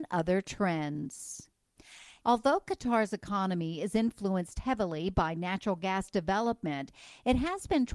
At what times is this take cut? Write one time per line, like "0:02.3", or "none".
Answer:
0:02.2